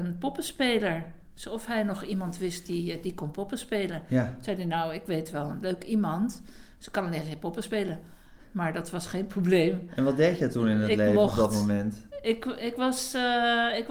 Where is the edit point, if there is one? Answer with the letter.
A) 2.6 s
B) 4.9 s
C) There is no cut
C